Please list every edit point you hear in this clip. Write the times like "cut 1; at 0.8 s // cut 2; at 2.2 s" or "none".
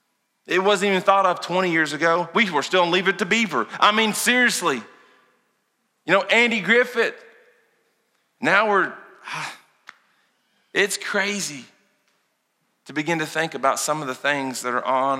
none